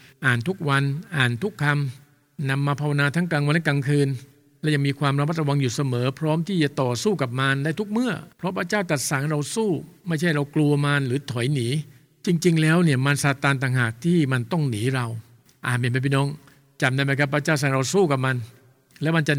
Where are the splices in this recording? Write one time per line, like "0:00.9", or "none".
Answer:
0:08.3